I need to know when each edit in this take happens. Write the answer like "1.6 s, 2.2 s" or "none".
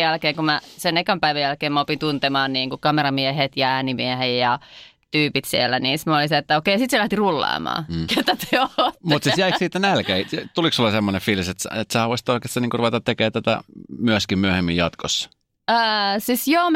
8.1 s